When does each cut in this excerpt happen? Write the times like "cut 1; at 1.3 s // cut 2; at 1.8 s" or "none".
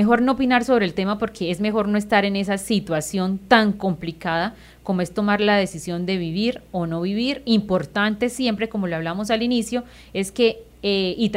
none